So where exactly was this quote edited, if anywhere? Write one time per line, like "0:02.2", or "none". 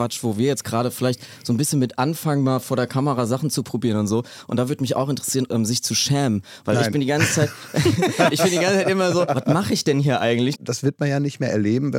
0:05.5
0:09.3
0:10.5